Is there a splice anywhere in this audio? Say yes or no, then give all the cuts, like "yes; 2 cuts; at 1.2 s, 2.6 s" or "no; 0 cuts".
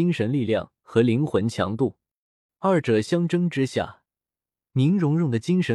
yes; 1 cut; at 2.5 s